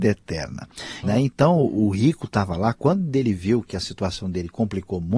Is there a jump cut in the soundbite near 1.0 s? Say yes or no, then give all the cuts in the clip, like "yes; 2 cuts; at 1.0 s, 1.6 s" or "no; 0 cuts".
yes; 1 cut; at 1.0 s